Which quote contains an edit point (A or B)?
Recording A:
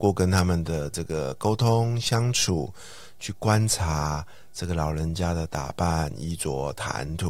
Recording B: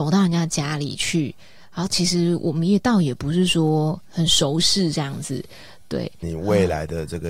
B